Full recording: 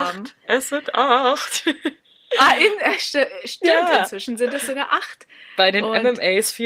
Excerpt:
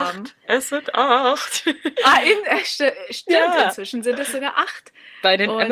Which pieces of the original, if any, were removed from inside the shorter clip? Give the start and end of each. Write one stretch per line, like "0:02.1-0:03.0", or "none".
0:01.9-0:02.3